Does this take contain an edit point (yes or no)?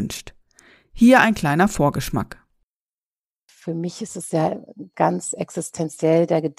no